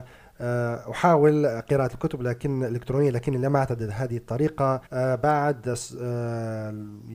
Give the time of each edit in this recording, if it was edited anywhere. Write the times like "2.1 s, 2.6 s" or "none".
4.9 s

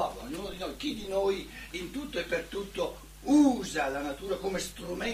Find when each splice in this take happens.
none

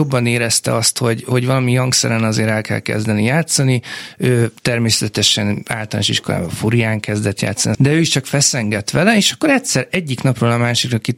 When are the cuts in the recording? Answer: 4.6 s, 7.7 s

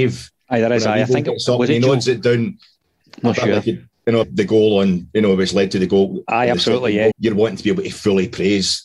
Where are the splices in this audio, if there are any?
4.2 s, 7.1 s

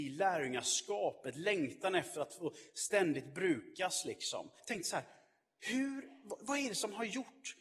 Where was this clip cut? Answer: 4.6 s

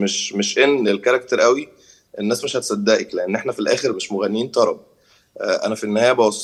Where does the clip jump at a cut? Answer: 3.9 s

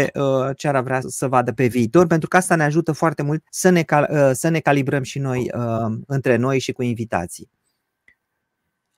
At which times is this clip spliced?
1.0 s, 3.5 s

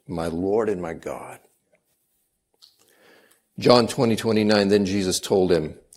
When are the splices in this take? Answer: none

